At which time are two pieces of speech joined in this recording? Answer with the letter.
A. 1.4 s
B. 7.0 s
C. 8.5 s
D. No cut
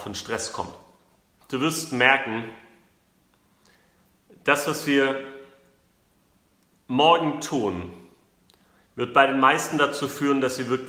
A